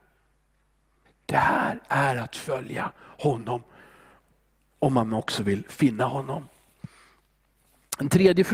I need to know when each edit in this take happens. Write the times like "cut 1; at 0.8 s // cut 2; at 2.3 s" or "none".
cut 1; at 1.1 s